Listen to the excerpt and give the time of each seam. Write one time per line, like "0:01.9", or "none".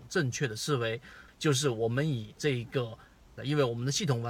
0:01.3
0:03.4